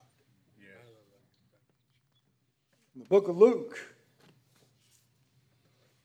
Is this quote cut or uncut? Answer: uncut